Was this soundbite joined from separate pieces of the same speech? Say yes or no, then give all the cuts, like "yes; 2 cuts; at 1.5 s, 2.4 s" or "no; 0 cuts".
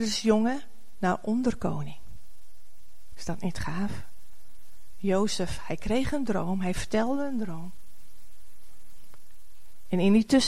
yes; 1 cut; at 3.1 s